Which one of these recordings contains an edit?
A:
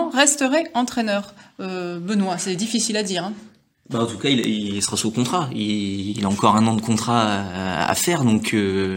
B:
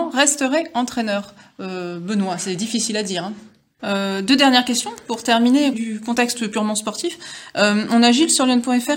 B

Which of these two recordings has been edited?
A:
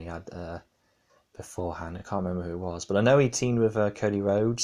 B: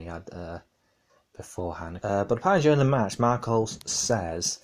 B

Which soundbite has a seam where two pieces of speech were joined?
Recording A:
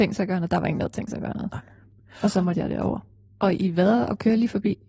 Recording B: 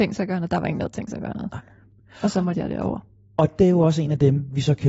A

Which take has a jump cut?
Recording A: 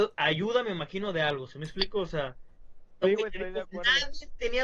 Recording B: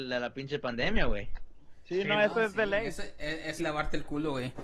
B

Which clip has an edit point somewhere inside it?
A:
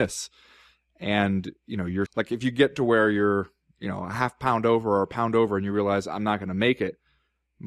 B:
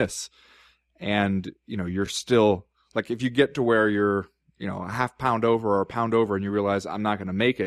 A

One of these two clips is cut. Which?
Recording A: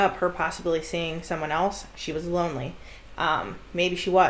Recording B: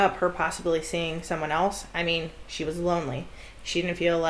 A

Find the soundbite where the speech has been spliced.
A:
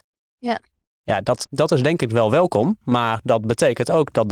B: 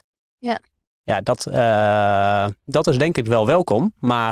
A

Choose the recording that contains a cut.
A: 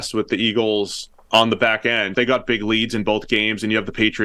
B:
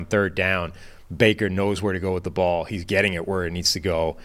A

